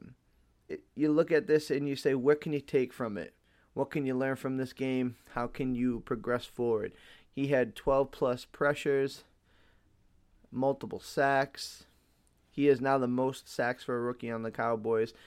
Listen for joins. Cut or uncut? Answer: cut